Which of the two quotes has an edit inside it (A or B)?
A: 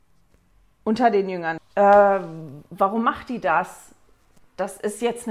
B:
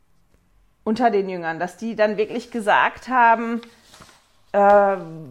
A